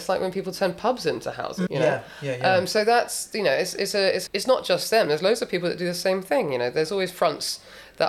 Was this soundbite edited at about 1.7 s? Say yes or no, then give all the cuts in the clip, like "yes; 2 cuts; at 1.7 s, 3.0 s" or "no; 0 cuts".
yes; 2 cuts; at 1.7 s, 4.3 s